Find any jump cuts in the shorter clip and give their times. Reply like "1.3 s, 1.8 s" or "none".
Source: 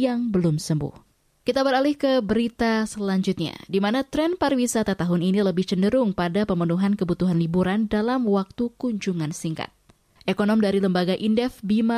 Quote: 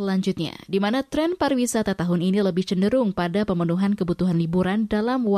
none